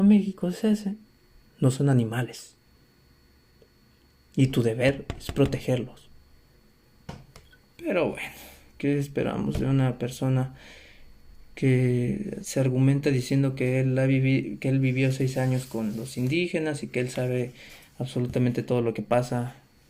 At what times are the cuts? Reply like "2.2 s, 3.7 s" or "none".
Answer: 1.5 s